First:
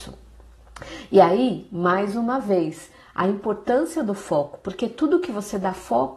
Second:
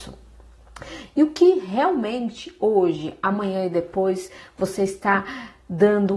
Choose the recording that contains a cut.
second; 1 cut; at 1.1 s

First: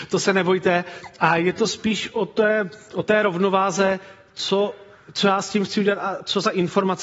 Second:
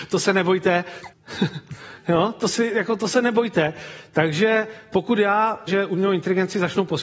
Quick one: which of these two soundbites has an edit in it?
second; 2 cuts; at 1.1 s, 5.7 s

